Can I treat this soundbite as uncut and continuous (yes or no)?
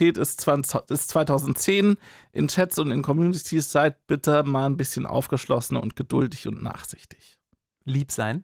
yes